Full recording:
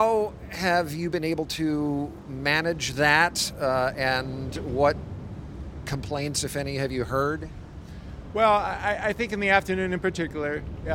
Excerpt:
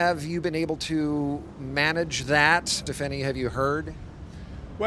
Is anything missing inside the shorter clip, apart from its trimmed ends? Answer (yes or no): yes